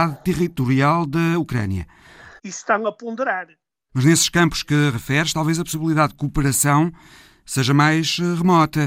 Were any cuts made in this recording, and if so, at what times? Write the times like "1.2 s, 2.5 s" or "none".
2.4 s, 3.9 s, 5.3 s